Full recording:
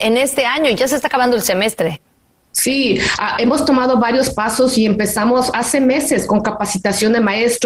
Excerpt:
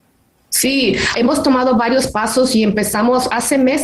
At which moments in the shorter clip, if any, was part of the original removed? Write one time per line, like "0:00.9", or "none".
0:01.1